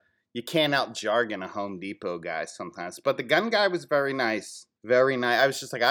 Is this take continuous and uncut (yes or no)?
no